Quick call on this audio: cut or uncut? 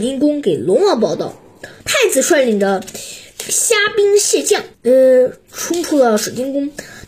cut